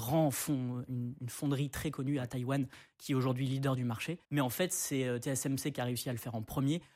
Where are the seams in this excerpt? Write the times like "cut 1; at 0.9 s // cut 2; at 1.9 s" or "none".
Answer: cut 1; at 4.2 s